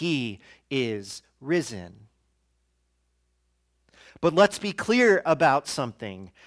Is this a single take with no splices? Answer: yes; 0 cuts

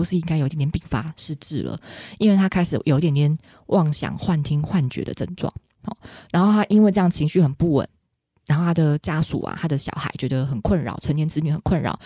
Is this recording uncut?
yes; 0 cuts

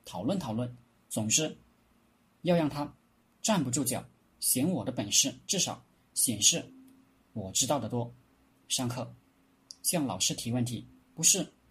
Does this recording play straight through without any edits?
yes; 0 cuts

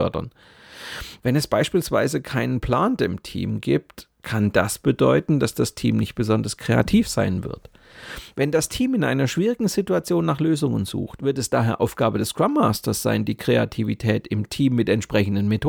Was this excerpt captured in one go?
no; 1 cut; at 1.2 s

